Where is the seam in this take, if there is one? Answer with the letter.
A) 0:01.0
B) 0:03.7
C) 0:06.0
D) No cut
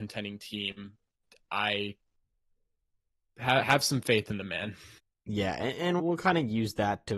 C